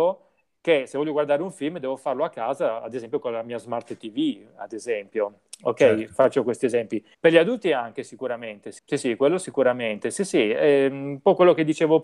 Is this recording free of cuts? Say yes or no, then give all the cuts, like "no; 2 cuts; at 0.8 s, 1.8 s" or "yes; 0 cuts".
no; 2 cuts; at 7.1 s, 8.8 s